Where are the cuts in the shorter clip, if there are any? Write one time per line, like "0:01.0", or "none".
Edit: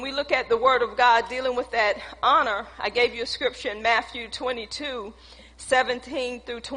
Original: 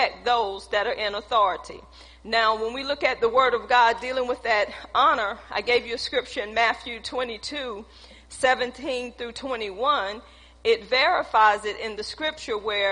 none